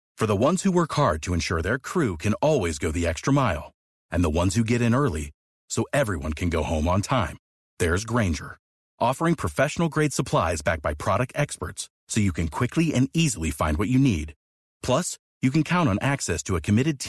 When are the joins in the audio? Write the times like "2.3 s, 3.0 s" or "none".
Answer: none